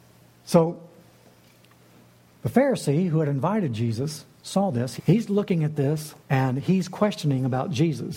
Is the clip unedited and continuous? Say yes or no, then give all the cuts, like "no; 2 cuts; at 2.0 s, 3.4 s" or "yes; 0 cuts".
no; 2 cuts; at 5.0 s, 6.2 s